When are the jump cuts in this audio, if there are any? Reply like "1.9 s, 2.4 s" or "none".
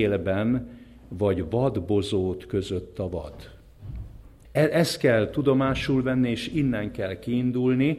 4.4 s